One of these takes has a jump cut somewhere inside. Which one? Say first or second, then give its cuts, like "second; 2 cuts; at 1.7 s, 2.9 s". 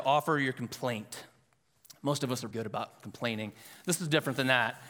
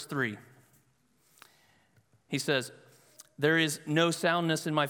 first; 1 cut; at 2.5 s